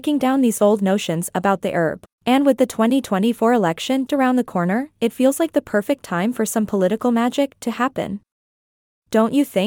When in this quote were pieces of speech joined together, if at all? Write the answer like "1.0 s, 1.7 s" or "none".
2.1 s, 4.1 s